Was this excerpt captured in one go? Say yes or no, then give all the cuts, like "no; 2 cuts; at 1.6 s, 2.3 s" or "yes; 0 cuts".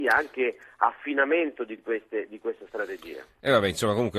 yes; 0 cuts